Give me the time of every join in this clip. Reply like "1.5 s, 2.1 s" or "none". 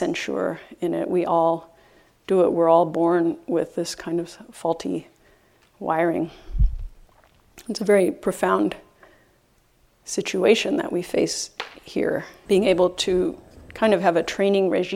12.4 s